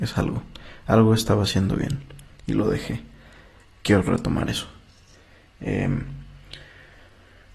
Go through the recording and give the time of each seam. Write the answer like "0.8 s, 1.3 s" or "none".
none